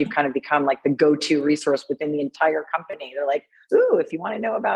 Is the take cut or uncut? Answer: uncut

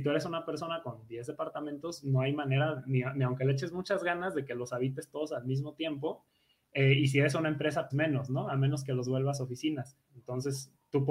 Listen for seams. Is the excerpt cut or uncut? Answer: cut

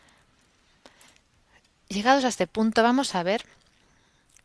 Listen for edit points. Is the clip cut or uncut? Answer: uncut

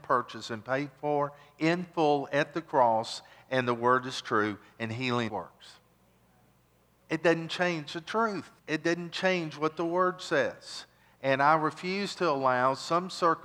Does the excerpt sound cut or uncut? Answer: cut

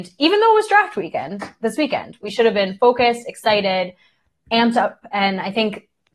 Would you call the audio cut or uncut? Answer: uncut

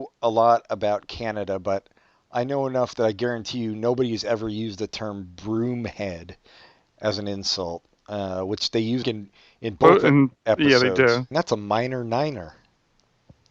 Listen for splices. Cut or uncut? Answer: cut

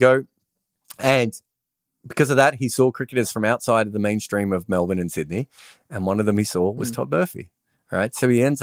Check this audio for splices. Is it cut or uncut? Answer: uncut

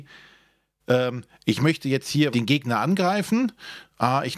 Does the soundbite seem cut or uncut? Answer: cut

